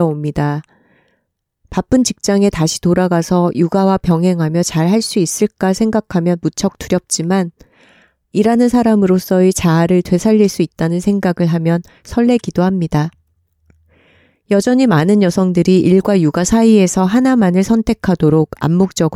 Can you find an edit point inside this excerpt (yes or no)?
no